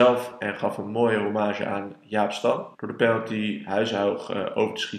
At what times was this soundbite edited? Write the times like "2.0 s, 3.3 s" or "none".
2.7 s